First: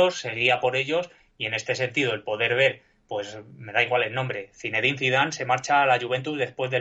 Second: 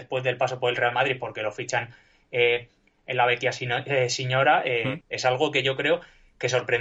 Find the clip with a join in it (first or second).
second